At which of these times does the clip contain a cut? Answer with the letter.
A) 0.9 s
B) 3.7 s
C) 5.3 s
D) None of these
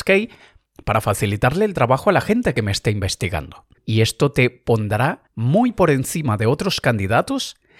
B